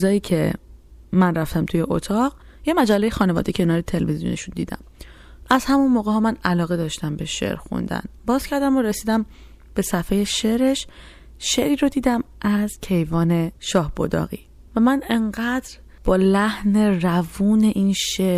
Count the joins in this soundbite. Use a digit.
0